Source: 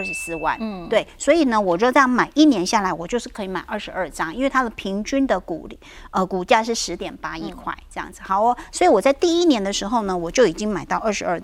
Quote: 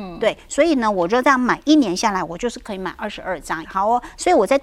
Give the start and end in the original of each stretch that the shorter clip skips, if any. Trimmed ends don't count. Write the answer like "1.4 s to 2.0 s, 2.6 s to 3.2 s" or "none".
4.3 s to 8.2 s